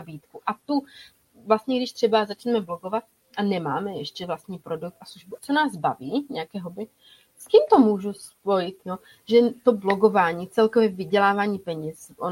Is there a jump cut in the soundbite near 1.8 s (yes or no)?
no